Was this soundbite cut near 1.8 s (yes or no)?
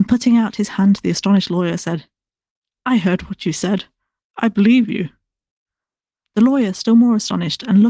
no